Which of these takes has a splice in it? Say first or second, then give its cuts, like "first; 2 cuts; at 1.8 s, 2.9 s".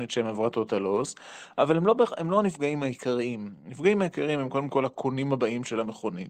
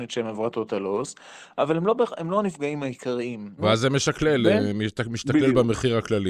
second; 1 cut; at 3.6 s